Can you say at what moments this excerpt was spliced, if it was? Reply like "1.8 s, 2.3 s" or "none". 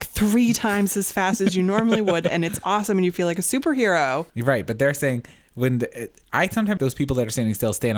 4.3 s, 6.8 s